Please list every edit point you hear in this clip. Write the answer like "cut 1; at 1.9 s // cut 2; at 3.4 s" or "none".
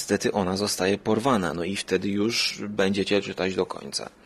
none